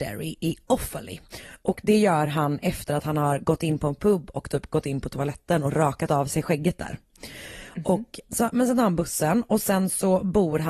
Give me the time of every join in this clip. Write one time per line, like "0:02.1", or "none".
0:08.3